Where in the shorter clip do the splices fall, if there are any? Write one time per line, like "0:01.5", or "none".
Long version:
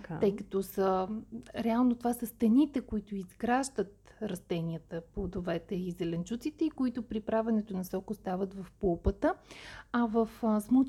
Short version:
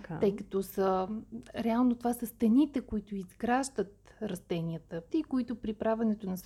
0:05.1